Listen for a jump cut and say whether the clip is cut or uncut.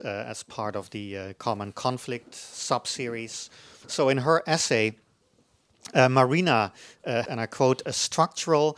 cut